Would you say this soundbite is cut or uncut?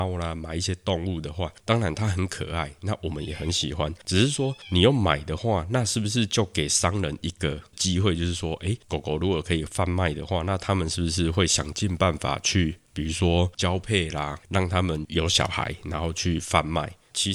uncut